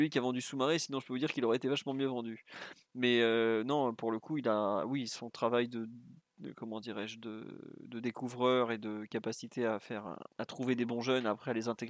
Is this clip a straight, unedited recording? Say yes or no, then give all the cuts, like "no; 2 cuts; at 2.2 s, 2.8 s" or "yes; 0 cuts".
no; 1 cut; at 10.3 s